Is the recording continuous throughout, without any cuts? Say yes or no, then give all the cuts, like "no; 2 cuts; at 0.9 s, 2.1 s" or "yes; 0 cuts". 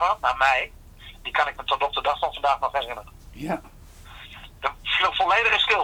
yes; 0 cuts